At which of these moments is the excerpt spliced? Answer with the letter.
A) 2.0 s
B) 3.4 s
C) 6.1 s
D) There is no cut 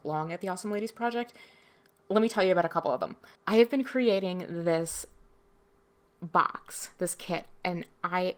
B